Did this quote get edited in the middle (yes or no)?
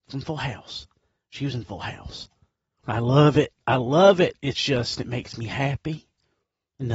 yes